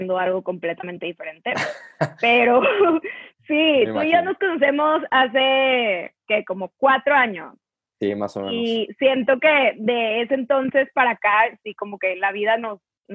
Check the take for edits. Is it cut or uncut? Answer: uncut